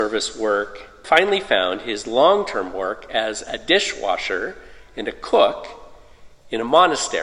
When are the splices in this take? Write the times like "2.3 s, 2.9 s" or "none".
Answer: 1.0 s